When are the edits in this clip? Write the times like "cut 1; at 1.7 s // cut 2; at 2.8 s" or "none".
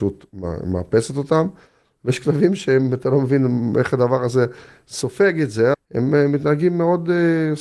cut 1; at 5.7 s